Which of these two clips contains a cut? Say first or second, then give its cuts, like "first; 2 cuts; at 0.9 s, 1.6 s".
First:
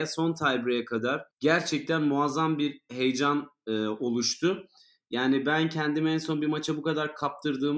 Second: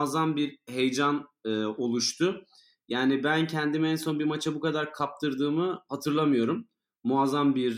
first; 1 cut; at 1.3 s